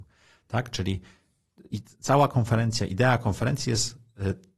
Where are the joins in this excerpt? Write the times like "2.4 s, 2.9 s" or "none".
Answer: 1.7 s